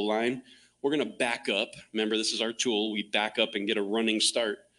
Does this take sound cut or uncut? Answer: uncut